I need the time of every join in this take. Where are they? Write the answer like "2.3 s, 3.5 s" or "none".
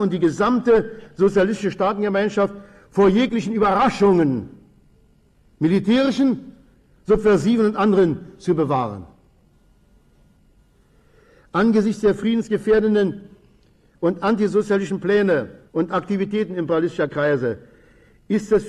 15.7 s